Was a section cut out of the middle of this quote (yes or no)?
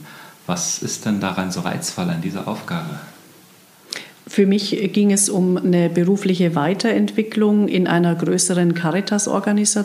no